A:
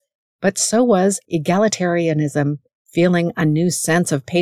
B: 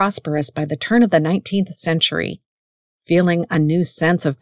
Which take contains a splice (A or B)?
A